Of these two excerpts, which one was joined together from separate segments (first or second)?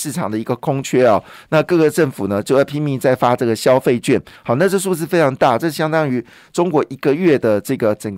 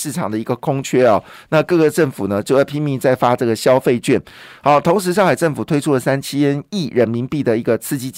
first